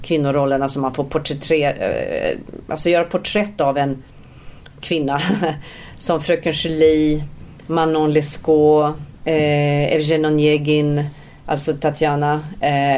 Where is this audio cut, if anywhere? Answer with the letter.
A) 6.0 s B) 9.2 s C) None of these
B